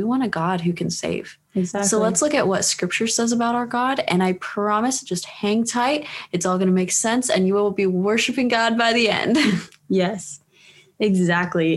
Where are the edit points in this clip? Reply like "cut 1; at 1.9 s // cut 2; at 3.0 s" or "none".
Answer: none